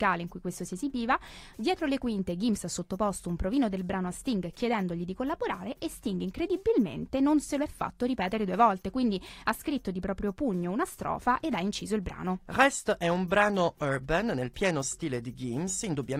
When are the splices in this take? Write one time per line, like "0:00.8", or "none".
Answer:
none